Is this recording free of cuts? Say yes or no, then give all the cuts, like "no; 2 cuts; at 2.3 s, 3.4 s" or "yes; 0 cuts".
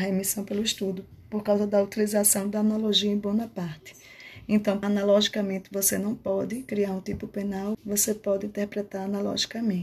no; 2 cuts; at 4.8 s, 7.7 s